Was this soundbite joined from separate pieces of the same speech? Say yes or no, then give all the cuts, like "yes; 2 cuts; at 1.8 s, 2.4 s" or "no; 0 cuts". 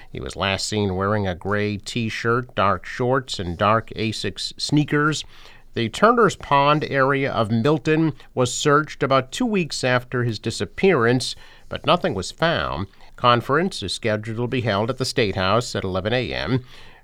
yes; 1 cut; at 13.1 s